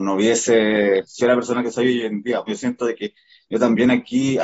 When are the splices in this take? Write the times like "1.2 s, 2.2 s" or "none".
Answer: 2.5 s